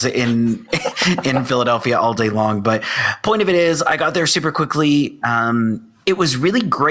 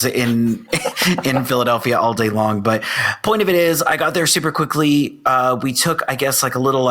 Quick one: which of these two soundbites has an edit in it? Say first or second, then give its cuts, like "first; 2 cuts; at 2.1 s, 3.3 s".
first; 1 cut; at 5.2 s